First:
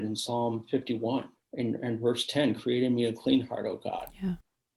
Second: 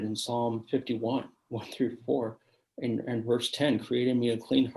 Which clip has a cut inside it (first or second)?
first